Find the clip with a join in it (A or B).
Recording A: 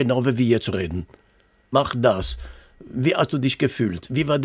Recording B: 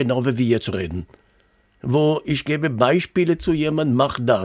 A